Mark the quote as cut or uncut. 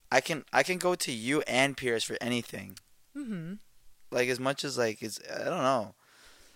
uncut